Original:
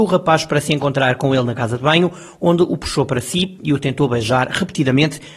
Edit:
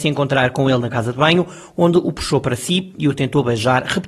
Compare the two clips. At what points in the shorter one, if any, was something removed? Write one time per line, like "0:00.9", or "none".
none